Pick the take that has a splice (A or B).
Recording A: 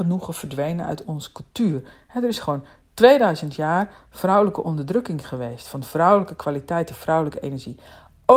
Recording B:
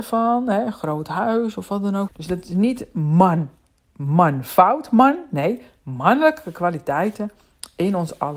B